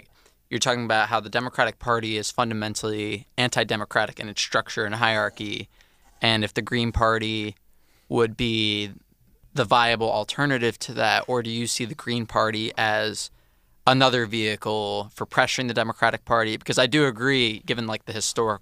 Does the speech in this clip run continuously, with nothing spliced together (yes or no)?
yes